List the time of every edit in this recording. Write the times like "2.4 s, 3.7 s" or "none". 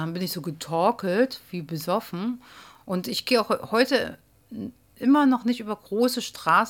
2.8 s